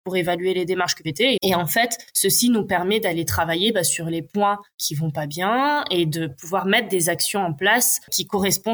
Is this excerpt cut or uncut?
cut